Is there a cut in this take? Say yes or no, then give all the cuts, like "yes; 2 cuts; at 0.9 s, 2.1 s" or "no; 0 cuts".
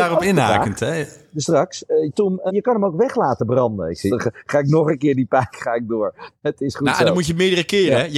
yes; 3 cuts; at 2.5 s, 4.1 s, 5.5 s